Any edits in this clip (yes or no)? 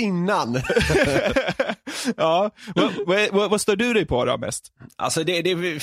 no